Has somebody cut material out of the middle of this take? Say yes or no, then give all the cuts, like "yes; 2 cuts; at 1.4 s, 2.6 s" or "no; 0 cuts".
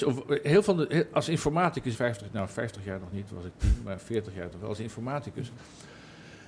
yes; 1 cut; at 1.9 s